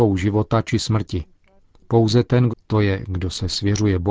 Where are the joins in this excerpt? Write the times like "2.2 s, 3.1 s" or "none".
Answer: 2.5 s